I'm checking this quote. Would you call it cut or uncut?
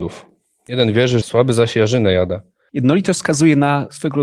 cut